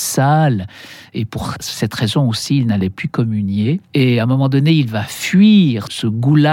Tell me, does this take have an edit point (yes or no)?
no